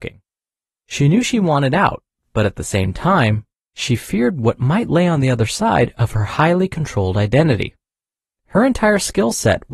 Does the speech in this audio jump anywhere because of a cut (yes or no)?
no